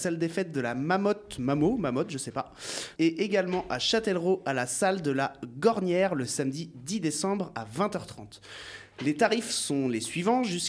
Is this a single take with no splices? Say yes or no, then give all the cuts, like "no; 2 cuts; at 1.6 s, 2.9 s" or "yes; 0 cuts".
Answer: no; 1 cut; at 3.0 s